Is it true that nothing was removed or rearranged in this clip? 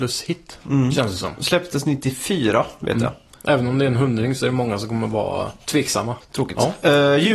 no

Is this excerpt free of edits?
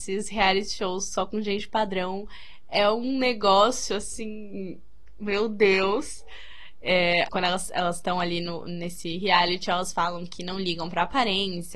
no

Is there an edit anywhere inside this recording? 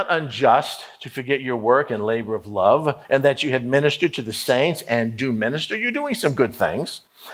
yes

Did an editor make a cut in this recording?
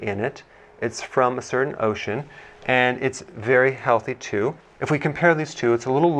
no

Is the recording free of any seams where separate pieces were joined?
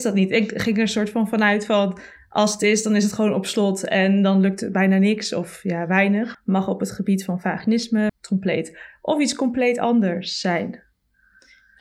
no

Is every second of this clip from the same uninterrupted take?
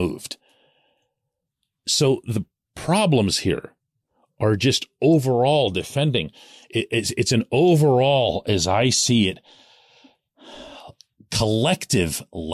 yes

